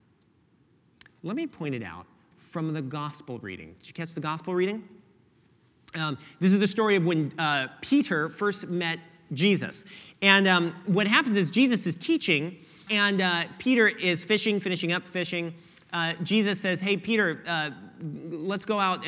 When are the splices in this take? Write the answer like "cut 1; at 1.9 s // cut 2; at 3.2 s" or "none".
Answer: cut 1; at 12.9 s